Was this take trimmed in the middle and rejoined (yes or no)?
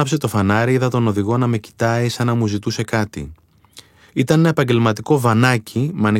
yes